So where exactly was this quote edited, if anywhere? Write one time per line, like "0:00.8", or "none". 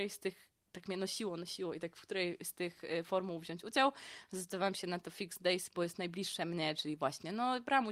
none